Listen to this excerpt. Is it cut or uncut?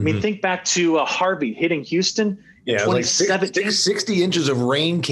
uncut